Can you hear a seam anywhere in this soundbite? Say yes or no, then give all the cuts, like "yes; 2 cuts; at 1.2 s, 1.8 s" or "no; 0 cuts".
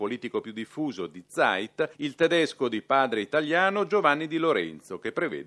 no; 0 cuts